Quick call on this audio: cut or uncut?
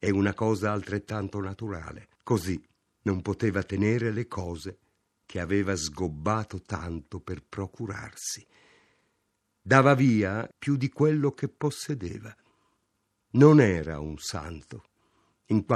cut